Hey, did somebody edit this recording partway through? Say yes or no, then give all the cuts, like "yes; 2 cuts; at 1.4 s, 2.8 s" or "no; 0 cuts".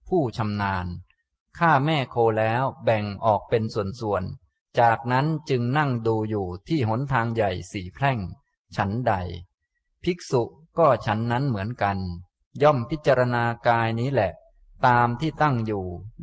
no; 0 cuts